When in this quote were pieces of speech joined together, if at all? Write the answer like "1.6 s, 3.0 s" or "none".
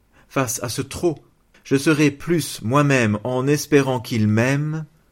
1.5 s